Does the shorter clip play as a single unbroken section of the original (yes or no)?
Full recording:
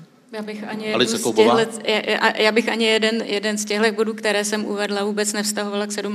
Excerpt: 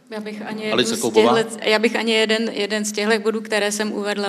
no